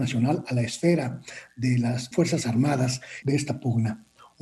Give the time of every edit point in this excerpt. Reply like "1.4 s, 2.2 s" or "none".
2.1 s, 3.2 s